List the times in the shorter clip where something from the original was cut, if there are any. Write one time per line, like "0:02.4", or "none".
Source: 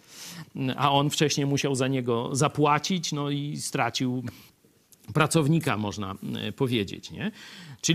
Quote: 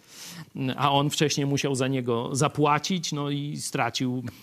none